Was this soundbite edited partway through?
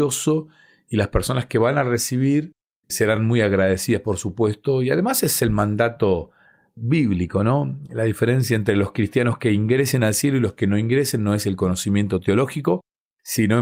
no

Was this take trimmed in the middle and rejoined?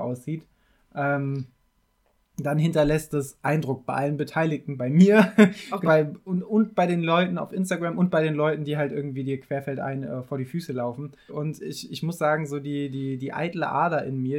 yes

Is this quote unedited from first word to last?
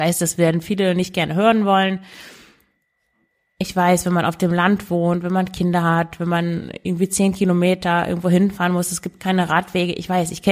yes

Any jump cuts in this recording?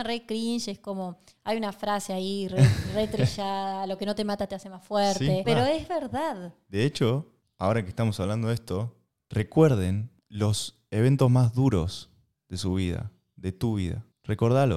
yes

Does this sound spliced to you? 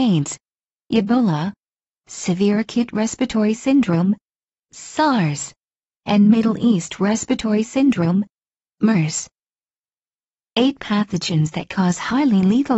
no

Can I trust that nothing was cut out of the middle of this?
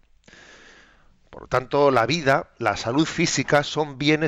yes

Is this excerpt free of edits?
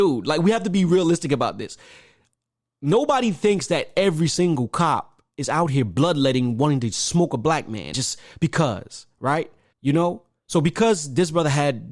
no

